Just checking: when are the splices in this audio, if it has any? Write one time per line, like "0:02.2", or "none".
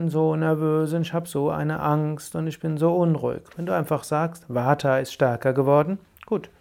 none